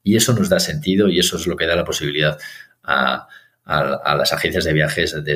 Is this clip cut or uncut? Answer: uncut